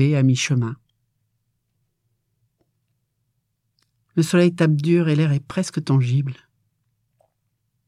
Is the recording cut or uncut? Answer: uncut